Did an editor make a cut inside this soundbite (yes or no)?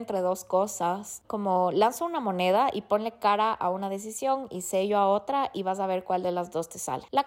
yes